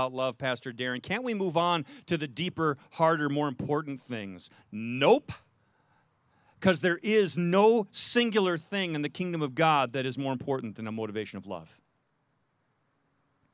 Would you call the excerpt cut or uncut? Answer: uncut